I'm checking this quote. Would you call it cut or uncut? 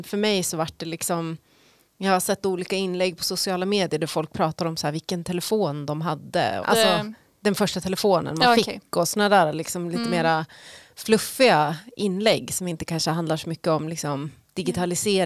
cut